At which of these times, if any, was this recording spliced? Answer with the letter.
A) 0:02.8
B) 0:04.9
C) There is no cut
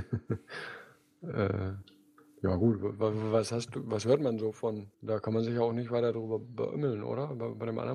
B